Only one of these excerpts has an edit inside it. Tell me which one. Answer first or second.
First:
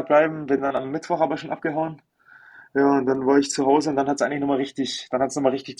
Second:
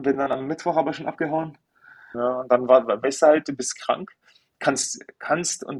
second